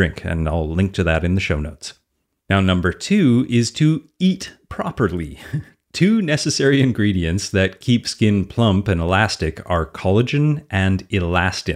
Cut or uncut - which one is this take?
uncut